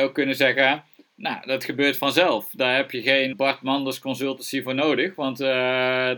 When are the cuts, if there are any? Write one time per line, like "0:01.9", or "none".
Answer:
0:03.3